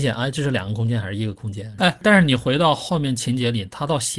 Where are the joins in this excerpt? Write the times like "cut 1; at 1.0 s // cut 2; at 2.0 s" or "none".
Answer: cut 1; at 1.8 s